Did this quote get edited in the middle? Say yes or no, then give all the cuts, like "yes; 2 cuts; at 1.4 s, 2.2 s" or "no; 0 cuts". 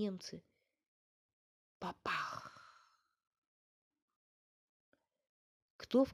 yes; 1 cut; at 1.7 s